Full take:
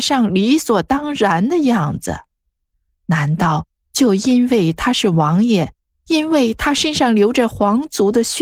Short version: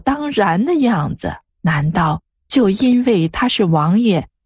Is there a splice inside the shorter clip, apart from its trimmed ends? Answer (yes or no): yes